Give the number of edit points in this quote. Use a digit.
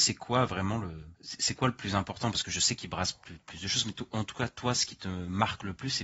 1